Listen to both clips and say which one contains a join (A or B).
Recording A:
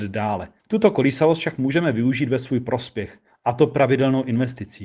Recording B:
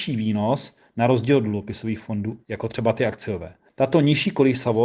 B